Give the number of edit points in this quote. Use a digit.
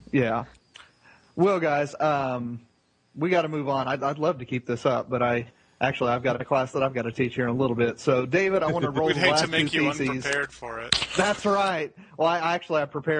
0